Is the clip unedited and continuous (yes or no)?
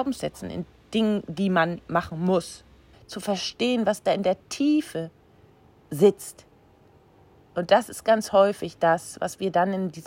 no